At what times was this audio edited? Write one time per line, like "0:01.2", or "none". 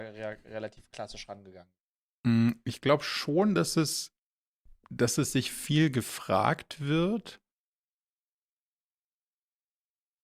none